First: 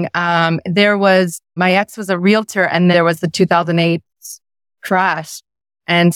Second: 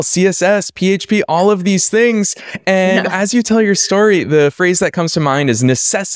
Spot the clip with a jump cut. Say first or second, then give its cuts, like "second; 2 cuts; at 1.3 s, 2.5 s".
first; 2 cuts; at 1.6 s, 2.9 s